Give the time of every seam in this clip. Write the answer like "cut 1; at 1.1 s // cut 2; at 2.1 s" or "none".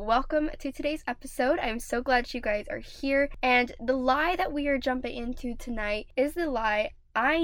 none